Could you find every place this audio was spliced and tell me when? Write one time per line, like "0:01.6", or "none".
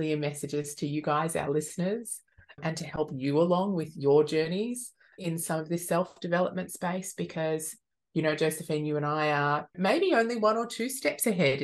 none

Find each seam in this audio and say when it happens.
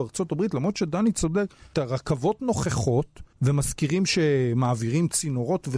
0:01.7
0:03.3

